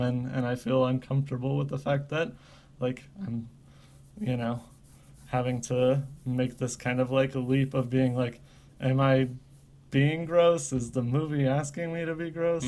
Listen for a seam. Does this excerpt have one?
no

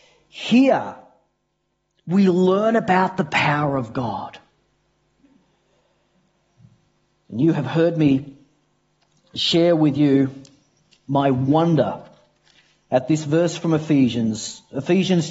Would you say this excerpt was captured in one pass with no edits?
yes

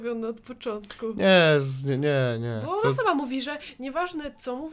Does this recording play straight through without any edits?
yes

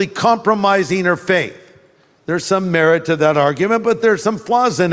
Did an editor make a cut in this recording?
no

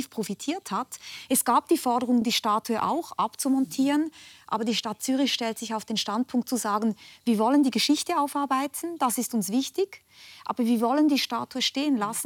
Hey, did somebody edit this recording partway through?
no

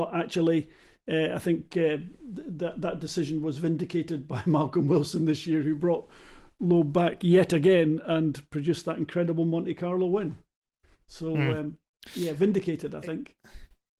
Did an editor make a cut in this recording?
no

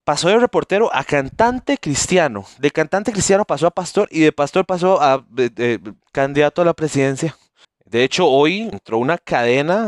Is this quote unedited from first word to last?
no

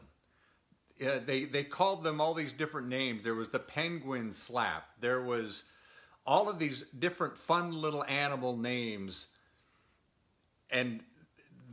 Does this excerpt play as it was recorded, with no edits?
yes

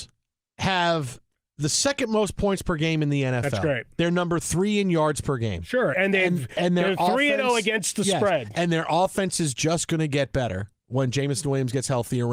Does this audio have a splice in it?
yes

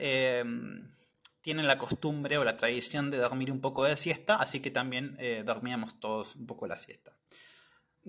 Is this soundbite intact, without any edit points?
yes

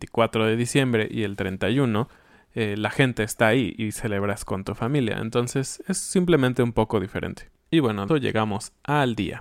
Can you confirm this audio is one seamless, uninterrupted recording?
no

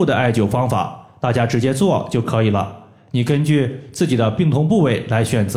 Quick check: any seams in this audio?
no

